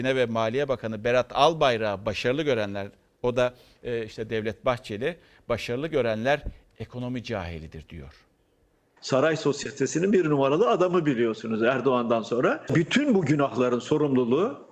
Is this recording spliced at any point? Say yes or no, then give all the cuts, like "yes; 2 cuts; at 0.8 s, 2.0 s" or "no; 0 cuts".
yes; 2 cuts; at 9.0 s, 12.7 s